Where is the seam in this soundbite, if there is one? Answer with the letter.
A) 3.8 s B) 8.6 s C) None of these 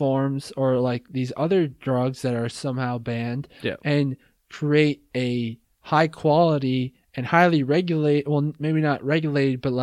C